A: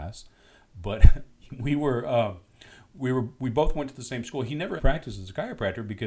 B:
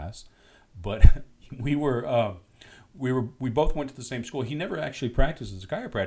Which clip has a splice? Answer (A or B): A